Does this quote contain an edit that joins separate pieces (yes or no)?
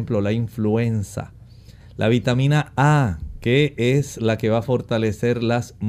yes